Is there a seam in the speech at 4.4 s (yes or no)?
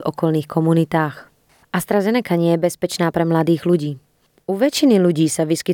no